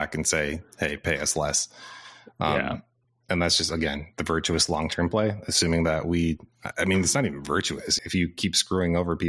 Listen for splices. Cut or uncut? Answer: cut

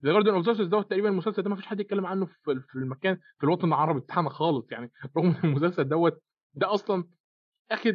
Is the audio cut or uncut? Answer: uncut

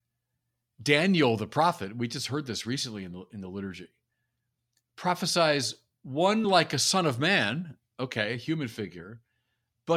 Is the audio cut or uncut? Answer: uncut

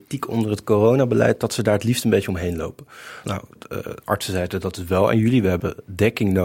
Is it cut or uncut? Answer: cut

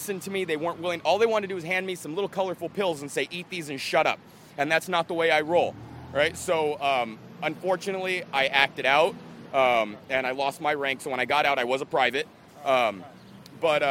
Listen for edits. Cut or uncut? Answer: uncut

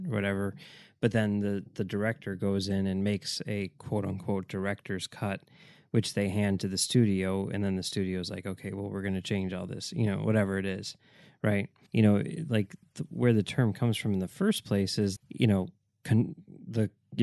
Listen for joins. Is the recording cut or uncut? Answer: cut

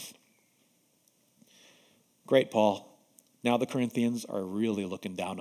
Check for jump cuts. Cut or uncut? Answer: uncut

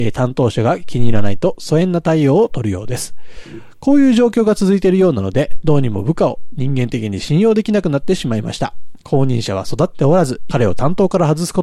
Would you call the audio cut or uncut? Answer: cut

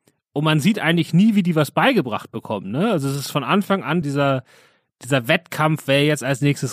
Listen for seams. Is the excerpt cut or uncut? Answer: cut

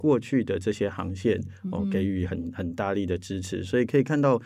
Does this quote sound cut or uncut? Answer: uncut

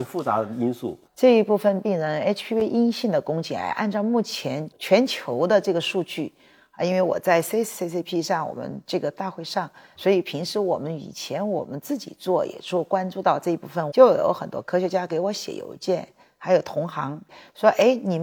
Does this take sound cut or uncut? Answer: cut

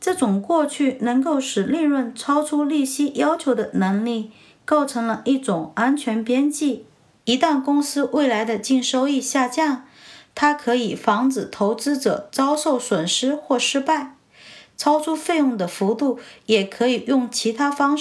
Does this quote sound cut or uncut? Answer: uncut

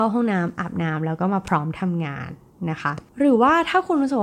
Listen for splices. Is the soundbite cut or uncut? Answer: uncut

